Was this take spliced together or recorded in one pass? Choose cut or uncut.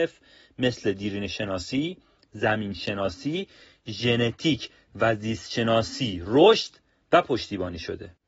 uncut